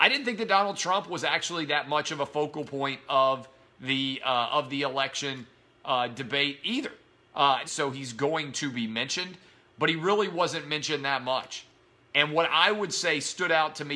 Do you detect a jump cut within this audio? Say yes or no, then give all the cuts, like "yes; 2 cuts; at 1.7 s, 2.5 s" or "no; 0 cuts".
yes; 1 cut; at 7.6 s